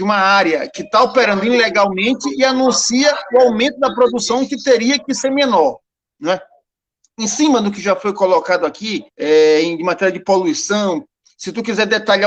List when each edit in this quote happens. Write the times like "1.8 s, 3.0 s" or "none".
6.1 s, 9.1 s